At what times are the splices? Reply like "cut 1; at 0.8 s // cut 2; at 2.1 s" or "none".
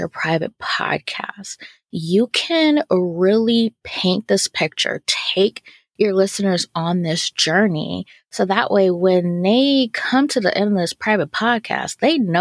none